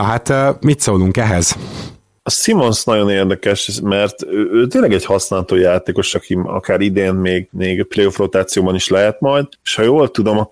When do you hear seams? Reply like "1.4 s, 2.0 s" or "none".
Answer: 6.1 s